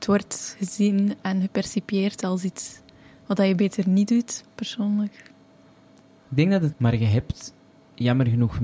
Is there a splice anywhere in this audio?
yes; 2 cuts; at 4.4 s, 6.7 s

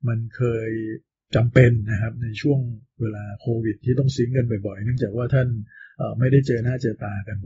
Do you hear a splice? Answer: no; 0 cuts

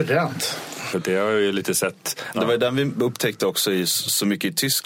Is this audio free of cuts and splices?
no; 2 cuts; at 0.9 s, 2.3 s

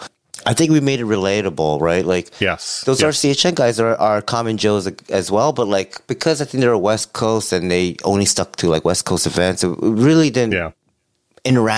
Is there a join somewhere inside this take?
no; 0 cuts

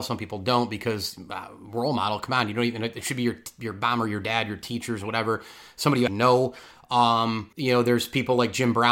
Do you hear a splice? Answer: yes; 2 cuts; at 6.1 s, 7.5 s

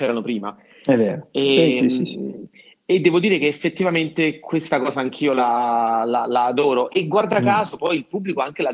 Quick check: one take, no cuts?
yes; 0 cuts

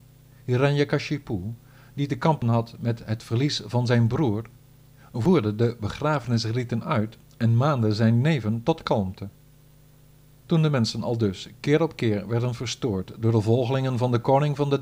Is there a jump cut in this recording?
yes; 1 cut; at 10.4 s

